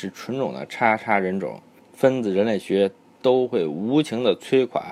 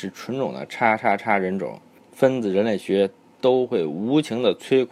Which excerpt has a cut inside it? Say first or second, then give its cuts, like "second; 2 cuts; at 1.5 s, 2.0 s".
first; 1 cut; at 1.0 s